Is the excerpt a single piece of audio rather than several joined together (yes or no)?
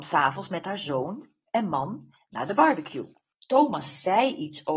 no